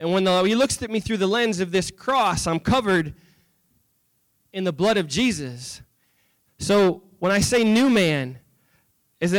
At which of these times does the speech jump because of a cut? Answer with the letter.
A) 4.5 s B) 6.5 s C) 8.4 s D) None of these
B